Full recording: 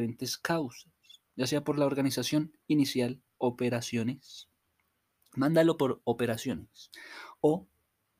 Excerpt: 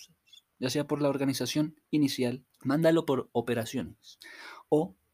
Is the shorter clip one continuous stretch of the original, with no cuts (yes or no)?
no